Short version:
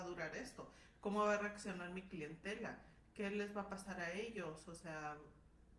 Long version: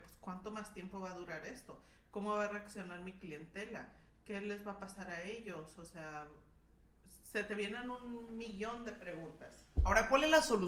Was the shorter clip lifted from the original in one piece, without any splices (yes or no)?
yes